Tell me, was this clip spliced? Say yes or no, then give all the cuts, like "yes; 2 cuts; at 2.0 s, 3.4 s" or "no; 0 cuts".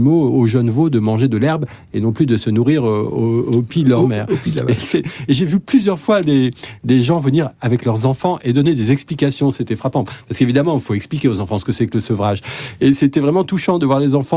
no; 0 cuts